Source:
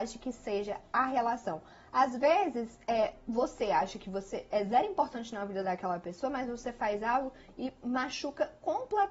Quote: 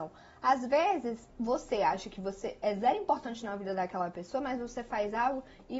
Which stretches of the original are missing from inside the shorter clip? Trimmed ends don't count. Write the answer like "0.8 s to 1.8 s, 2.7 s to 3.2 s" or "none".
2.8 s to 3.2 s